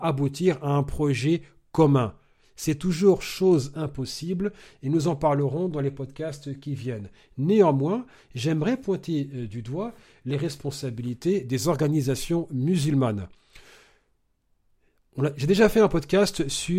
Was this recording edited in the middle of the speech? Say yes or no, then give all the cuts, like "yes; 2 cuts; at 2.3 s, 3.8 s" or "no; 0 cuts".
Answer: no; 0 cuts